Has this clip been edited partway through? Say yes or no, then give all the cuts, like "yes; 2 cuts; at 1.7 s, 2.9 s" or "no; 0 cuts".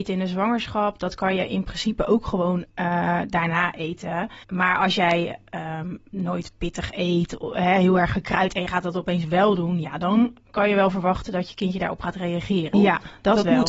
yes; 2 cuts; at 4.4 s, 12.7 s